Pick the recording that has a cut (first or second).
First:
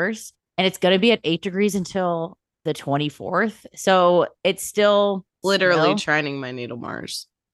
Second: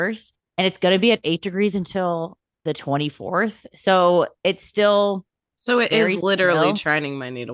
first